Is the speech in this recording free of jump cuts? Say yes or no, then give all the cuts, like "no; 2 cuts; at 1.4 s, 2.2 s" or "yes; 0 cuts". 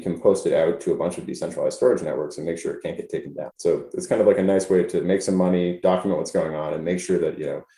no; 1 cut; at 3.5 s